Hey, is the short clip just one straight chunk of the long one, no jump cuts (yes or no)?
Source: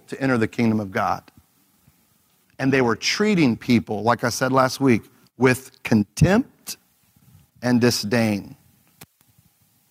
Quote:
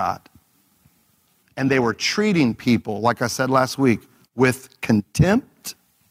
yes